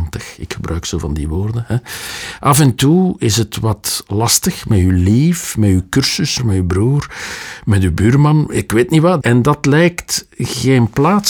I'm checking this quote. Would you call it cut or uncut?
cut